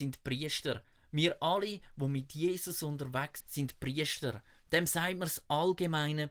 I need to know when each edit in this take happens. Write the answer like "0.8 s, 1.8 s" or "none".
3.4 s

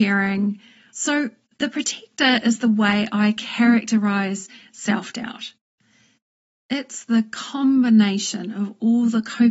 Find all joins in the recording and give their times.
0.9 s

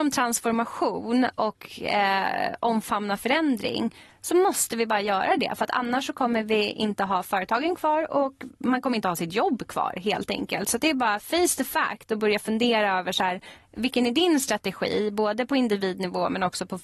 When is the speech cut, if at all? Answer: none

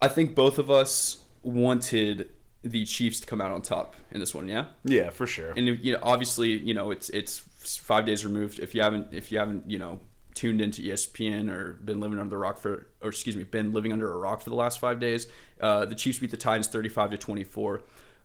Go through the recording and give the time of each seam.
none

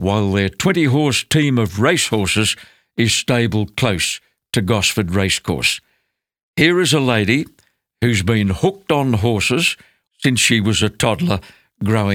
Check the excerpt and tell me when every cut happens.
10.1 s

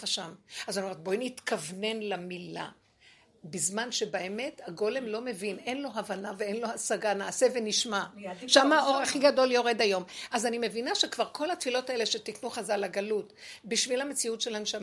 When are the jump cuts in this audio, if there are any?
none

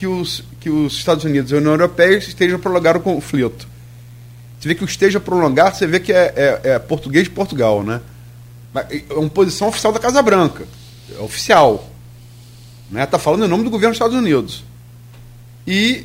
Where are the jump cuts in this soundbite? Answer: 8.6 s

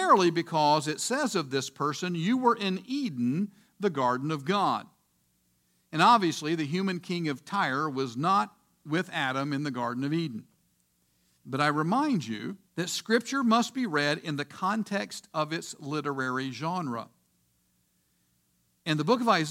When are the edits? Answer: 11.4 s, 12.7 s

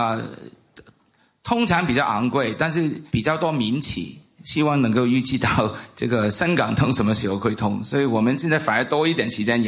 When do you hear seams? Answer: 3.1 s, 4.4 s

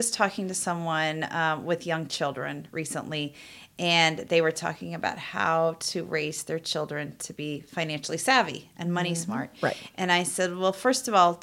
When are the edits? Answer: none

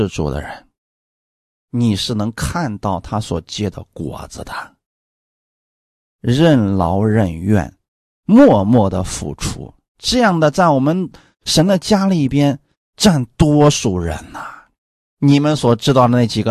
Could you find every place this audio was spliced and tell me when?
none

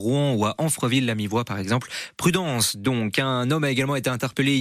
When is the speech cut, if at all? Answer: none

